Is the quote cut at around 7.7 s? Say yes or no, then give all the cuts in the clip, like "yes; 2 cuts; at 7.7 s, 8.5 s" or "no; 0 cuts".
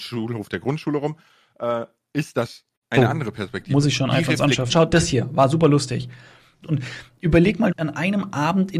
yes; 3 cuts; at 4.7 s, 6.6 s, 7.7 s